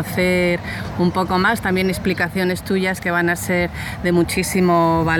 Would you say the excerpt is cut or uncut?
uncut